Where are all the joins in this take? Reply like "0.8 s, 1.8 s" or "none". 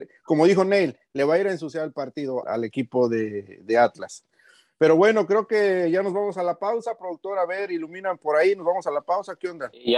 2.4 s